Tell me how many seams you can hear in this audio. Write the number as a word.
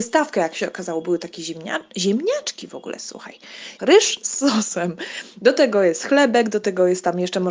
one